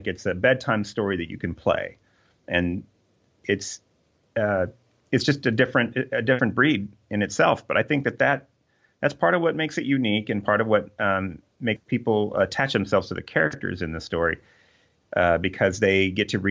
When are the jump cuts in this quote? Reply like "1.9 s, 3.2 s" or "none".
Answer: none

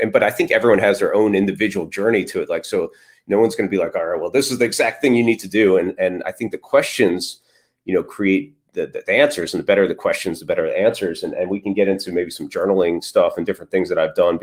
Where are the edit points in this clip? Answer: none

